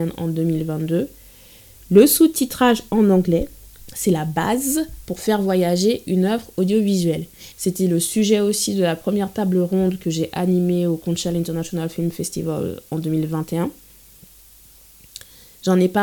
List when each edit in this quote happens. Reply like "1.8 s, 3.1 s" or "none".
7.5 s